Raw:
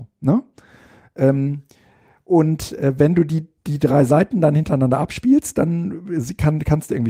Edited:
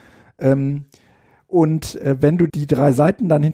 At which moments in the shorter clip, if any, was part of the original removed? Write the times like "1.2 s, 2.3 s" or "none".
2.5 s